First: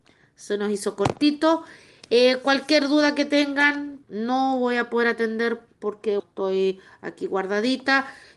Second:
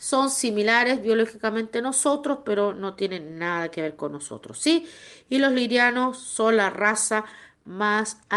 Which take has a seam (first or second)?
first